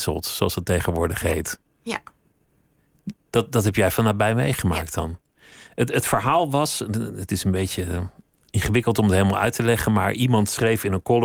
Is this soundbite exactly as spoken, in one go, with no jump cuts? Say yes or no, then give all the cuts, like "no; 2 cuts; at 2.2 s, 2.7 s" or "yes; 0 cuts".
yes; 0 cuts